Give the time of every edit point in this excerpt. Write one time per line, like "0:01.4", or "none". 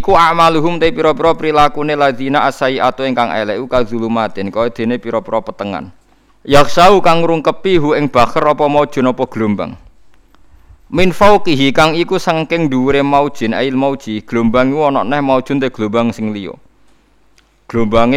0:06.3